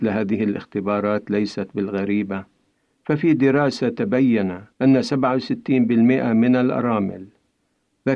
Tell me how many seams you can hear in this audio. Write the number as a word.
one